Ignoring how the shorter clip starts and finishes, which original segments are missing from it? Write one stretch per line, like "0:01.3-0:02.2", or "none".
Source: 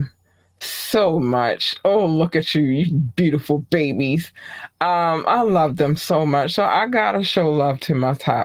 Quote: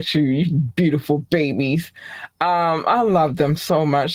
none